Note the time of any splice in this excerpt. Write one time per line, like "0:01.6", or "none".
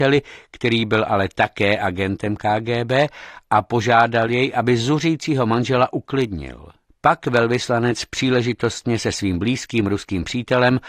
0:06.9